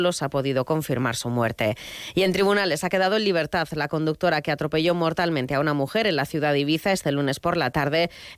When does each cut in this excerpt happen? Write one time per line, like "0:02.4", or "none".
none